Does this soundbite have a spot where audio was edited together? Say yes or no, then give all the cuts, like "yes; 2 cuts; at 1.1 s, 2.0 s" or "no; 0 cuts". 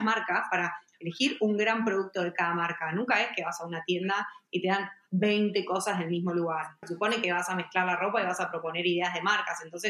yes; 1 cut; at 6.8 s